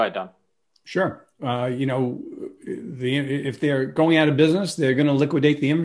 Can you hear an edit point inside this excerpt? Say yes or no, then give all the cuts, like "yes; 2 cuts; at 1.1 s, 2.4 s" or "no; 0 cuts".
no; 0 cuts